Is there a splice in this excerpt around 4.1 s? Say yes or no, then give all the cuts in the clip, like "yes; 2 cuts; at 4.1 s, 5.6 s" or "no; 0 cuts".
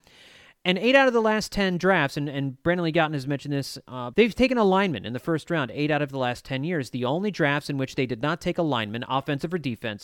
yes; 1 cut; at 4.1 s